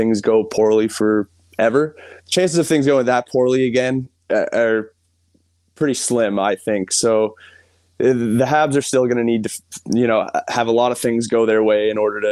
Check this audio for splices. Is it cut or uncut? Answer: cut